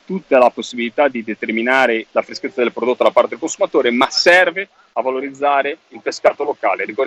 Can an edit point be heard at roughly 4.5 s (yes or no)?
no